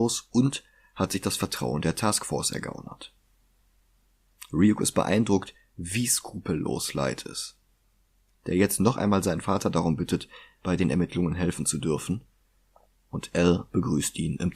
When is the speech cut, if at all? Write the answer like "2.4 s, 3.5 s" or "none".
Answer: none